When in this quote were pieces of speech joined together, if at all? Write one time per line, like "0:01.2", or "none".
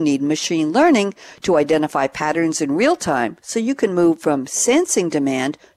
none